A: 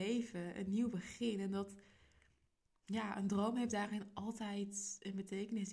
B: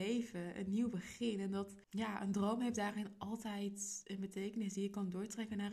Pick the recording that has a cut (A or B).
B